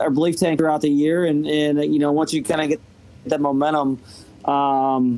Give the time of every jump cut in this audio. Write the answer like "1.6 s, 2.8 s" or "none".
none